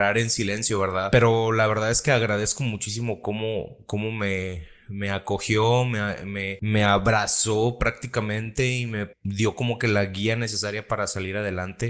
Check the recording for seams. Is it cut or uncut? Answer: cut